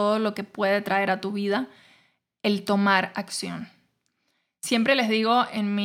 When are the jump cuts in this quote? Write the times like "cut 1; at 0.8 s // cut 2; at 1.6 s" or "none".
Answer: none